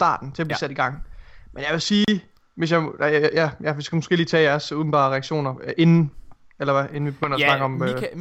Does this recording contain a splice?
no; 0 cuts

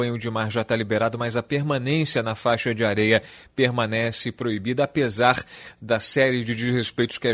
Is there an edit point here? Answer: no; 0 cuts

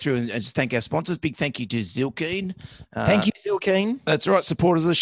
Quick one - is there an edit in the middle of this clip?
no; 0 cuts

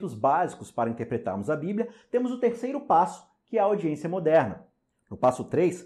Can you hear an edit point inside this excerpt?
no; 0 cuts

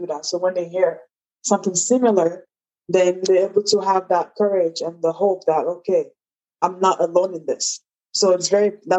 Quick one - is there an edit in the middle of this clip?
no; 0 cuts

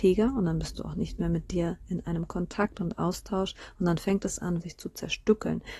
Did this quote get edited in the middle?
yes; 1 cut; at 4.6 s

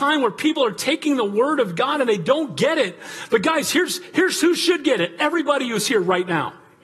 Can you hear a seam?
no; 0 cuts

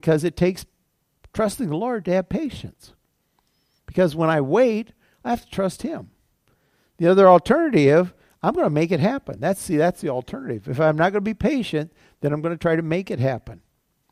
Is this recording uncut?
yes; 0 cuts

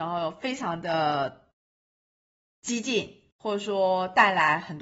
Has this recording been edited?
no; 0 cuts

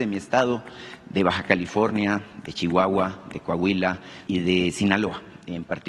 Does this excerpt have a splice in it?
yes; 1 cut; at 4.3 s

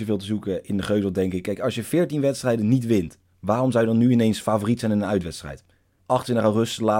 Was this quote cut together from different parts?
yes; 1 cut; at 6.0 s

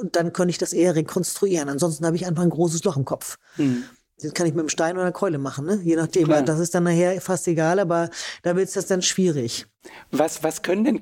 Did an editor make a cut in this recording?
no; 0 cuts

